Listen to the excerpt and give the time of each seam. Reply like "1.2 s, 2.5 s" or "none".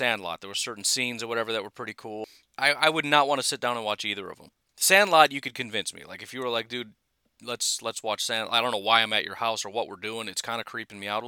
2.5 s